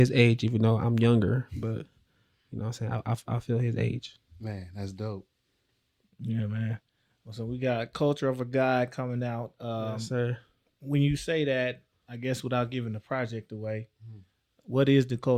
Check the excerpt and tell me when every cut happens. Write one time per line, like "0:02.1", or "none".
none